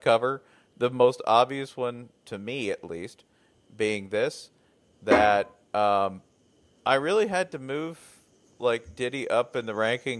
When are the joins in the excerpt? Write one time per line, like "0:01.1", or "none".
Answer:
none